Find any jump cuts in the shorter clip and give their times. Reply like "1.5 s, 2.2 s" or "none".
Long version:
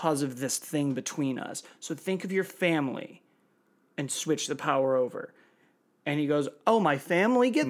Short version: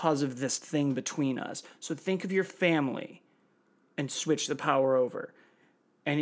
none